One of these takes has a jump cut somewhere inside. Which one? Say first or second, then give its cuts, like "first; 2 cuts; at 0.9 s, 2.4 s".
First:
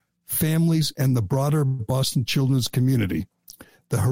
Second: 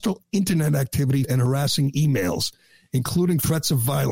second; 1 cut; at 1.2 s